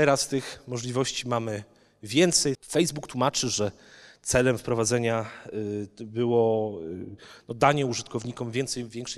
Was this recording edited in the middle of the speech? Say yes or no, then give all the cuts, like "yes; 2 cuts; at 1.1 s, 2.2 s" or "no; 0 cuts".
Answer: yes; 1 cut; at 2.5 s